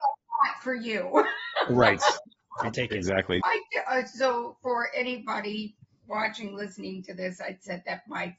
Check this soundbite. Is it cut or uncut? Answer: cut